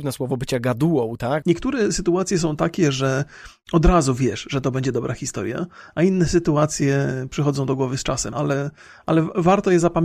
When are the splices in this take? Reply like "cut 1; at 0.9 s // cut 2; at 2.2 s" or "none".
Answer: cut 1; at 1.4 s // cut 2; at 8.3 s

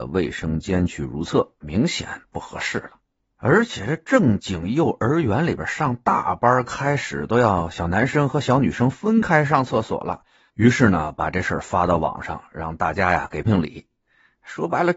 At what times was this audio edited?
cut 1; at 1.6 s // cut 2; at 10.5 s // cut 3; at 13.4 s

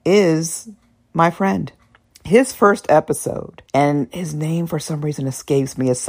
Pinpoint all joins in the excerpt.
cut 1; at 2.1 s // cut 2; at 3.7 s

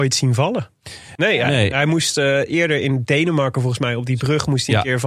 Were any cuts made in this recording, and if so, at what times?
cut 1; at 1.2 s

